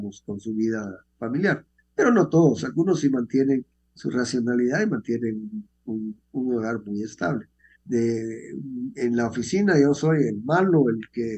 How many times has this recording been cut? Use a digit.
1